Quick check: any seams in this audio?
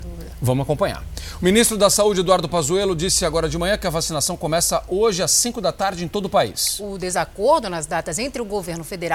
no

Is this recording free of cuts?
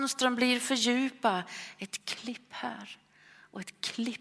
yes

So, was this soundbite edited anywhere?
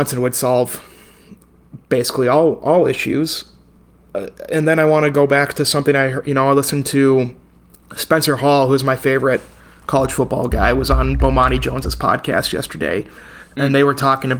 no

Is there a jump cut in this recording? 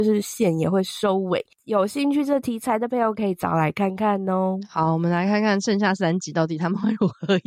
no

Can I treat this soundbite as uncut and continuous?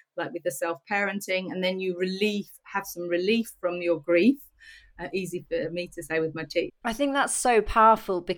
no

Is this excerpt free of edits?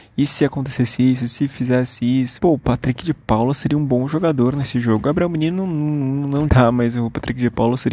no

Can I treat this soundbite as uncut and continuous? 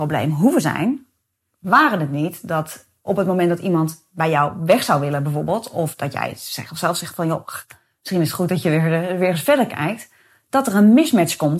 yes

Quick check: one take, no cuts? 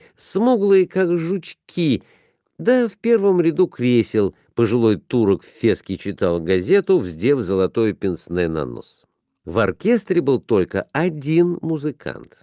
yes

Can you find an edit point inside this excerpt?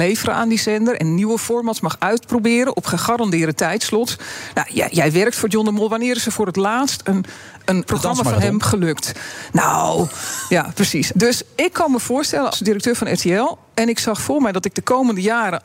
yes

